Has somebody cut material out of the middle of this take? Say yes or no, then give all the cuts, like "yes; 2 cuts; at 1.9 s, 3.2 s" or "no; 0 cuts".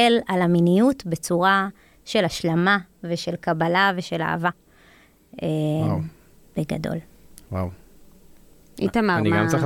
no; 0 cuts